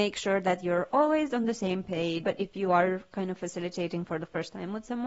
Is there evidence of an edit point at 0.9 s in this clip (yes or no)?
no